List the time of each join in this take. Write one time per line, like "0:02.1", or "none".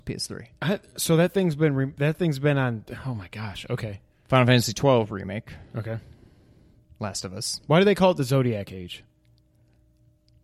none